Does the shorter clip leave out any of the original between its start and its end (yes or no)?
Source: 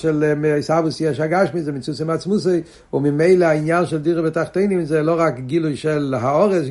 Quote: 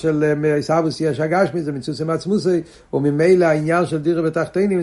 no